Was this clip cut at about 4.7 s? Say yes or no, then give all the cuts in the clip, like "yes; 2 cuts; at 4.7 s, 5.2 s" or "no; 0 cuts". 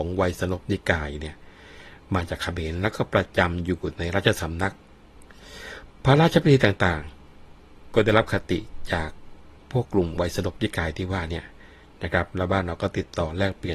no; 1 cut; at 9.8 s